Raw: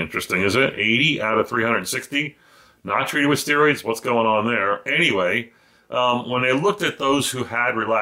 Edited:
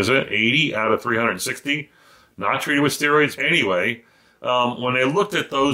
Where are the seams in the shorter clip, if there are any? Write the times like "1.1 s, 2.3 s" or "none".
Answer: 3.4 s

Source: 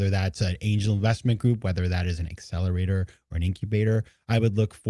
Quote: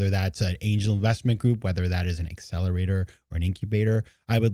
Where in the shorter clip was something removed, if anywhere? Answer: none

